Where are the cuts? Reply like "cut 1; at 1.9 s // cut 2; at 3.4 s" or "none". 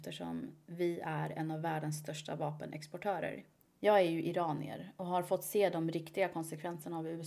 cut 1; at 3.7 s